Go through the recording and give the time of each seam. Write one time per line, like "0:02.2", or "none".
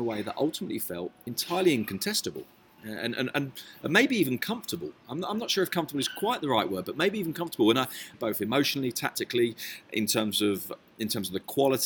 0:08.1